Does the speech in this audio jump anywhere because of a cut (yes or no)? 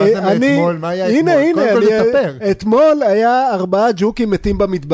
no